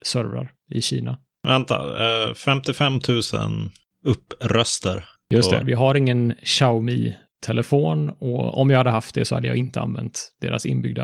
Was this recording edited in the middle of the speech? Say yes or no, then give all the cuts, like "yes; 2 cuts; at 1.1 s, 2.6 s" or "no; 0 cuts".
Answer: yes; 1 cut; at 5.6 s